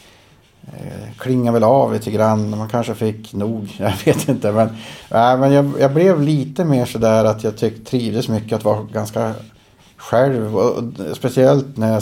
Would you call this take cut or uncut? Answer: uncut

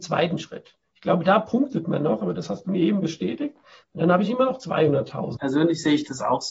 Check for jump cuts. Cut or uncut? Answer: cut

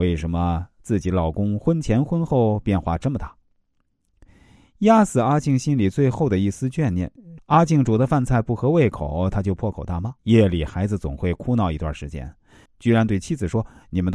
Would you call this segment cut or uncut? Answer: cut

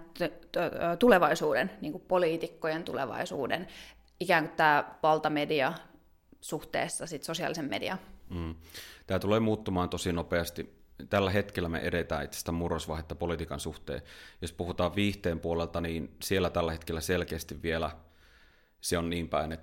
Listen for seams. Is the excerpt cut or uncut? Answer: uncut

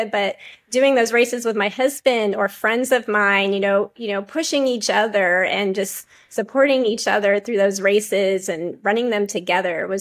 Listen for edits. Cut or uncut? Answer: uncut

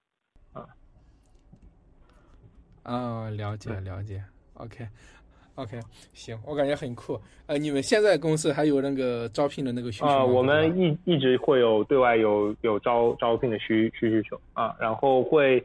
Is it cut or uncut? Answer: uncut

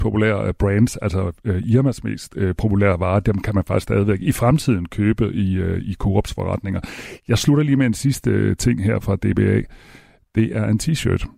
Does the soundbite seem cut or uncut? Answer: uncut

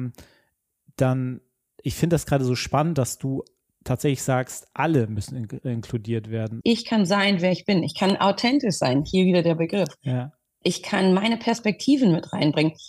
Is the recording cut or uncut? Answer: cut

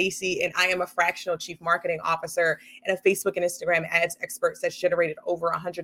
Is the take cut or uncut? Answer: uncut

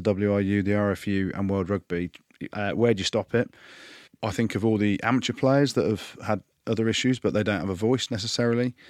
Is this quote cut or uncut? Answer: cut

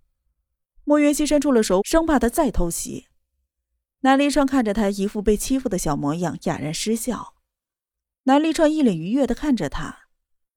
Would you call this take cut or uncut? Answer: cut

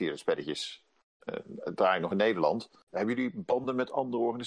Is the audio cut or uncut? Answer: cut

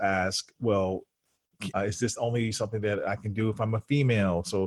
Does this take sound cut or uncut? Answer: cut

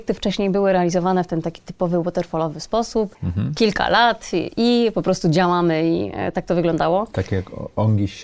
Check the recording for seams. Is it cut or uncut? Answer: uncut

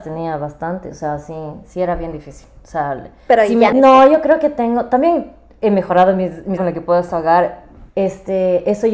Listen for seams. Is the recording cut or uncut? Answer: cut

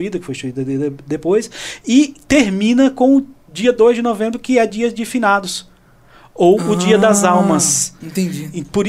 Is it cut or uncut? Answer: uncut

